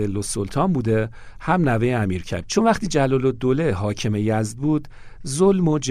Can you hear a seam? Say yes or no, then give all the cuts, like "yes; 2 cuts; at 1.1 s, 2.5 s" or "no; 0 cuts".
yes; 1 cut; at 2.4 s